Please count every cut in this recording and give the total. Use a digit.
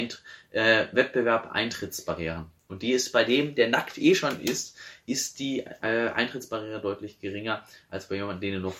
0